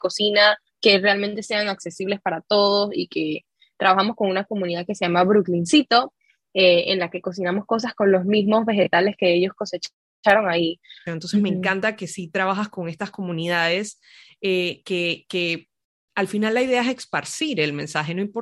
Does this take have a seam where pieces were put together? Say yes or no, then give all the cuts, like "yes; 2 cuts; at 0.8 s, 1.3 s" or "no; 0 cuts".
yes; 1 cut; at 11.1 s